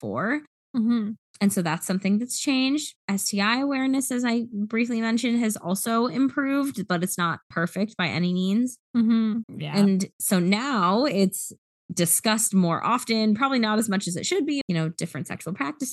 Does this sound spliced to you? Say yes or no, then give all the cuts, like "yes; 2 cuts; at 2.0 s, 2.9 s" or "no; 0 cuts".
yes; 2 cuts; at 9.4 s, 14.6 s